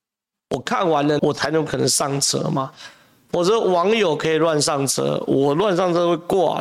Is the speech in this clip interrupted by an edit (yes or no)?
yes